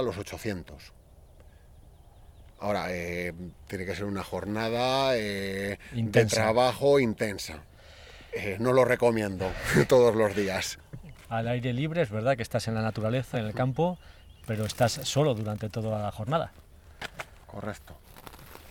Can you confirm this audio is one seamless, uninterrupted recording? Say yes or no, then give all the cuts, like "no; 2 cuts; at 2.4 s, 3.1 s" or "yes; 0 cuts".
no; 2 cuts; at 11.1 s, 13.3 s